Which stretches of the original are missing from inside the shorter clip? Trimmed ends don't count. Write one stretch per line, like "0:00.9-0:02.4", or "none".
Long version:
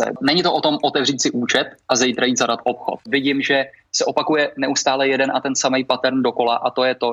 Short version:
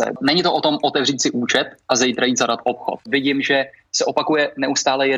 none